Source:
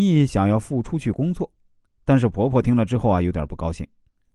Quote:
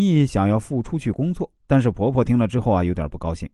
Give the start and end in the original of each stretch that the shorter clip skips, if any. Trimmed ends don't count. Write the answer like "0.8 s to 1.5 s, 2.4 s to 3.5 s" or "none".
1.6 s to 1.9 s